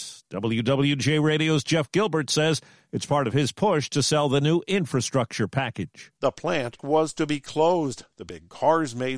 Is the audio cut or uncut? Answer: cut